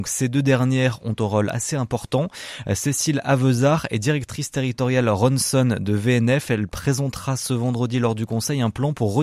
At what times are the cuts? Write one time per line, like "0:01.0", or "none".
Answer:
none